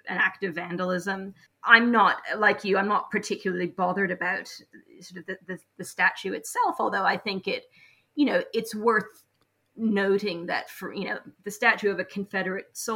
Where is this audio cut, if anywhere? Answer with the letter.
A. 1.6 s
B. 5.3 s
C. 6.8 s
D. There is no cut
D